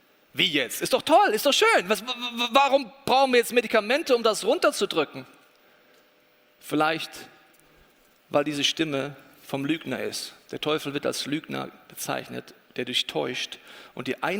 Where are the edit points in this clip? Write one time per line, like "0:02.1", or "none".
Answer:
none